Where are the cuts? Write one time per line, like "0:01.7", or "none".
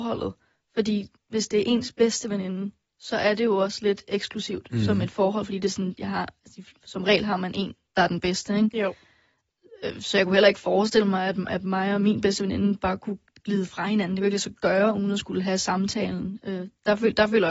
none